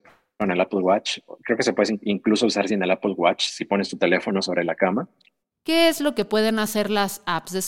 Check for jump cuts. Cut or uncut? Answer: cut